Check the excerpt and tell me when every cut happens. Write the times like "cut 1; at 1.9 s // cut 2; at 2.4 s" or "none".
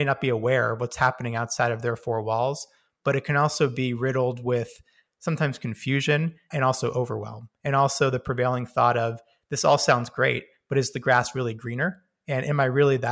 none